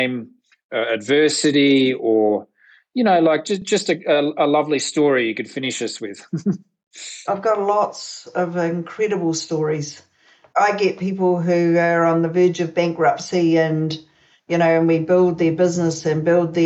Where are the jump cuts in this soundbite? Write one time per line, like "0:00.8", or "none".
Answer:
none